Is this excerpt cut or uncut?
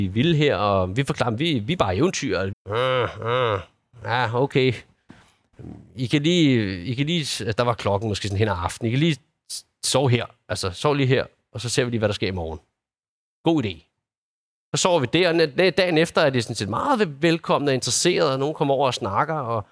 cut